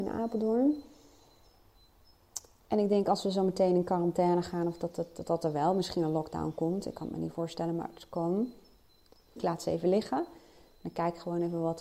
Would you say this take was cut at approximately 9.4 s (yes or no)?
yes